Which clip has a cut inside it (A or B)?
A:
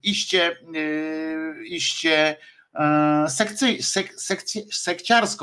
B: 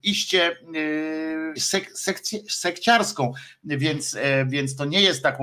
B